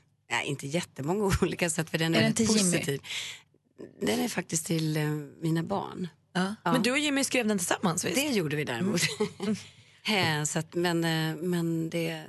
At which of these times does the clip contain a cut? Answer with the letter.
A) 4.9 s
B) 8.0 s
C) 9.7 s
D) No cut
D